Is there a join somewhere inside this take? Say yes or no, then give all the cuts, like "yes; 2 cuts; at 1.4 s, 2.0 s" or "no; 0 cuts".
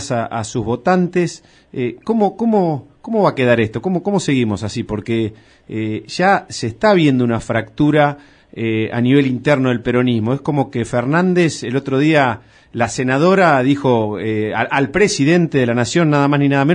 no; 0 cuts